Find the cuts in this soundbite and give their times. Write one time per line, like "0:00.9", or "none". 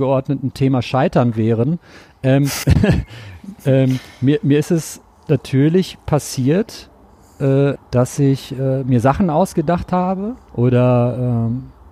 0:02.6
0:07.8